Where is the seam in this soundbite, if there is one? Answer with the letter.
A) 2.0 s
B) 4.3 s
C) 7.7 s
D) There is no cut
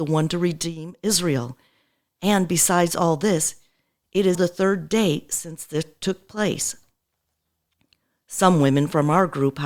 B